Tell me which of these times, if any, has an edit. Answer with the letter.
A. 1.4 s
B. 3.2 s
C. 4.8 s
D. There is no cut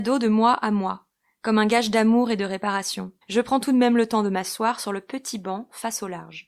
B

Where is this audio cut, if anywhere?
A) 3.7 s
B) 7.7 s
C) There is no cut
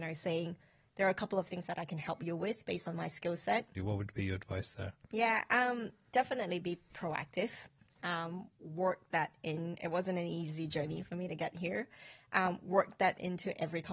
A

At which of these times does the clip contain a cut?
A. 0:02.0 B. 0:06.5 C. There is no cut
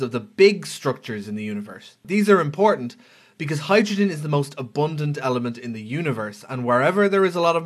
A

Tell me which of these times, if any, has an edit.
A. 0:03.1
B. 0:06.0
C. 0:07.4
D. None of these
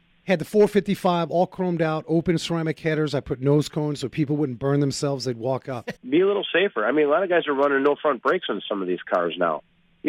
B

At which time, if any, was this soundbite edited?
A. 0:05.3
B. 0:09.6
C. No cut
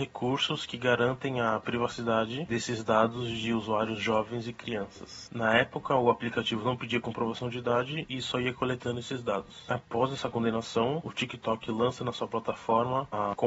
A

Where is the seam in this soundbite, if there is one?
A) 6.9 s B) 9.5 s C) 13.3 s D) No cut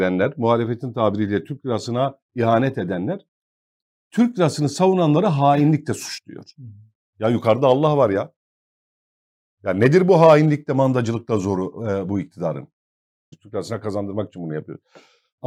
C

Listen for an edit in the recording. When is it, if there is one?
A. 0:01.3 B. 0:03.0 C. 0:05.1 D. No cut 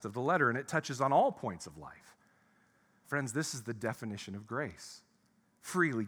B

